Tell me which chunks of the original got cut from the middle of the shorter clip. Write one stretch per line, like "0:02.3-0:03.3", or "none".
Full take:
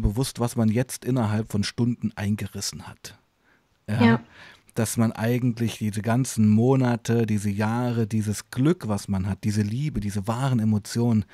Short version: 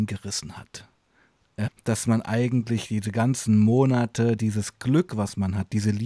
0:04.0-0:04.6
0:07.3-0:08.1